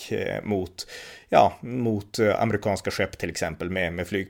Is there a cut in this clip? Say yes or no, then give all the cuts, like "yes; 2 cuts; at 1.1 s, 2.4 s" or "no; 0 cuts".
no; 0 cuts